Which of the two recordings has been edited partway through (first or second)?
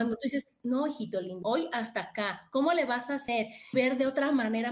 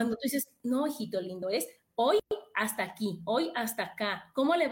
first